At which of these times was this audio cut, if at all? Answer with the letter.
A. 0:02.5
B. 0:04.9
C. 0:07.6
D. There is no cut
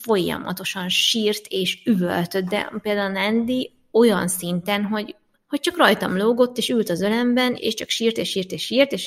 C